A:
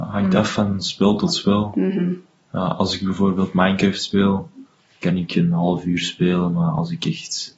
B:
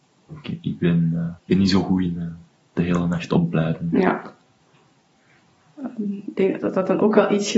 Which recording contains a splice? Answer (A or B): B